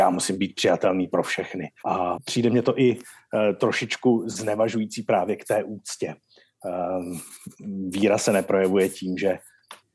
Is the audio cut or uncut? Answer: cut